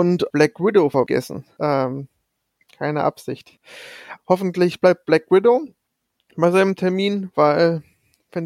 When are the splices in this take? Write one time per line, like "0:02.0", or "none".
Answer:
0:01.6
0:04.2